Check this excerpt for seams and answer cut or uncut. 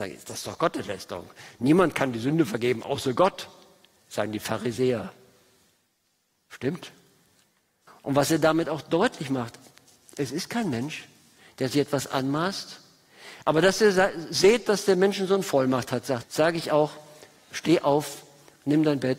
cut